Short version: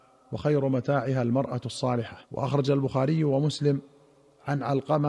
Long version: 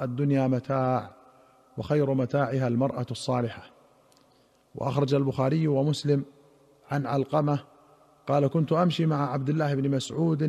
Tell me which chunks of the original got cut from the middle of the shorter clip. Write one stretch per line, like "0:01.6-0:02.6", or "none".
0:03.7-0:04.7